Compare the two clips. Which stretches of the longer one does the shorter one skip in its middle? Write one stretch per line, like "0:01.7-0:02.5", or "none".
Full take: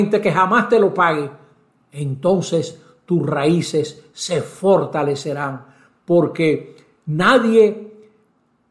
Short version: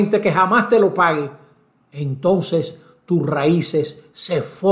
none